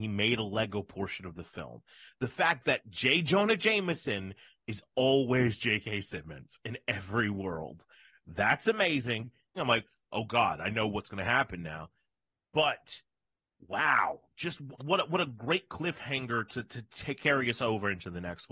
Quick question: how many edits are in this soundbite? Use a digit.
2